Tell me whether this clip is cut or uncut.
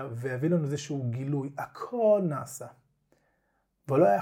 uncut